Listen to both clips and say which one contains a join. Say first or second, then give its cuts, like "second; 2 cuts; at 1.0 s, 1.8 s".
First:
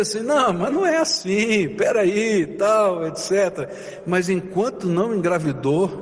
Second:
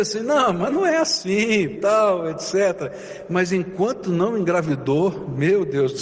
second; 1 cut; at 1.8 s